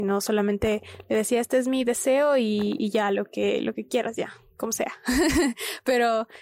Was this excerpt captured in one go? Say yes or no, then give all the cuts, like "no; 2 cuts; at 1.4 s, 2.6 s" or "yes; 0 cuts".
yes; 0 cuts